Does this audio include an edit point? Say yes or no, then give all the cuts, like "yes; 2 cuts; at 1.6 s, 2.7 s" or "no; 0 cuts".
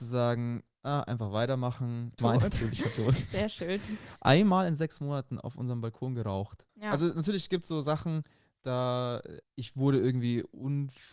yes; 3 cuts; at 2.2 s, 6.7 s, 9.4 s